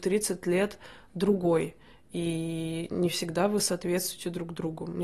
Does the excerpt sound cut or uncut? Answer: uncut